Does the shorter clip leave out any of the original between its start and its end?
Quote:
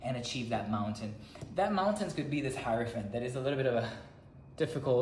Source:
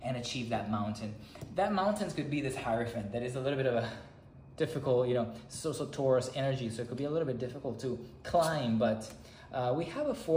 no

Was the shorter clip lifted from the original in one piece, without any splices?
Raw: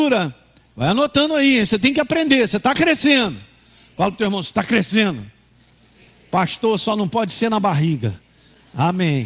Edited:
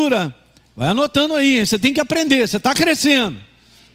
yes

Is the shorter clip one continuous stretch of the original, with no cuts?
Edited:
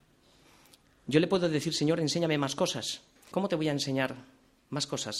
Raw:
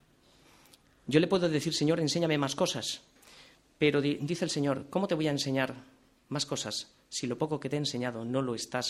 no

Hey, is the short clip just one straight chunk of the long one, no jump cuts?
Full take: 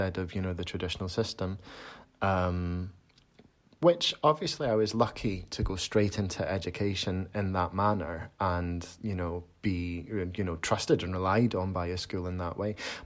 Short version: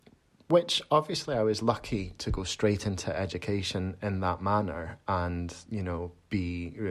yes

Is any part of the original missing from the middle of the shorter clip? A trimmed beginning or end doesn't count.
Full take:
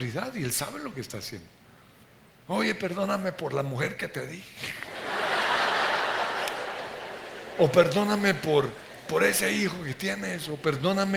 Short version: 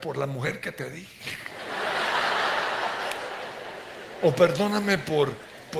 no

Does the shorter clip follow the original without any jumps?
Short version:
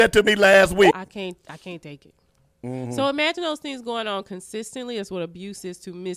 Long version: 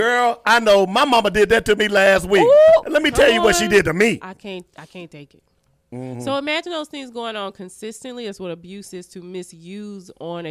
no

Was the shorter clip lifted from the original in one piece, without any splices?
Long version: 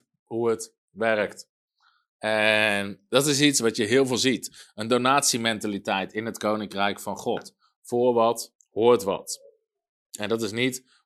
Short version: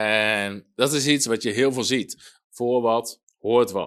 no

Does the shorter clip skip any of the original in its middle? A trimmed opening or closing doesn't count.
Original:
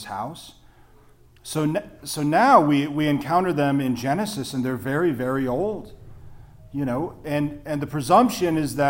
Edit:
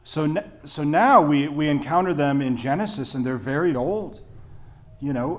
yes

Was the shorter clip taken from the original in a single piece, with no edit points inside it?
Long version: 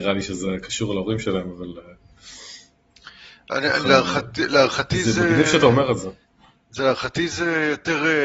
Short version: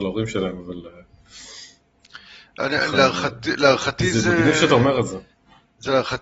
yes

